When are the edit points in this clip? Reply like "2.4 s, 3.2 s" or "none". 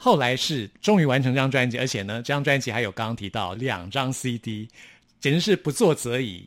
3.6 s